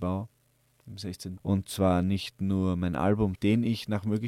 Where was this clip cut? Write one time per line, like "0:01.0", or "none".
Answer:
0:01.4
0:03.4